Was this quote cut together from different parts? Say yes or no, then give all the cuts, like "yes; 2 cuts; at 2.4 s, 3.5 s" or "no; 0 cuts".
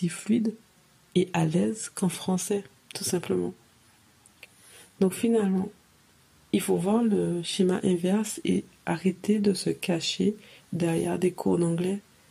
no; 0 cuts